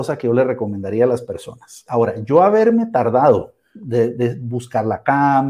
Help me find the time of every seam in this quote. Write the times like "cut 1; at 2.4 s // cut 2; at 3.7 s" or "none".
cut 1; at 1.9 s